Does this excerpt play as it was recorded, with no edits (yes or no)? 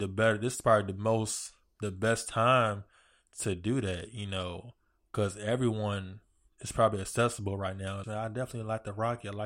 no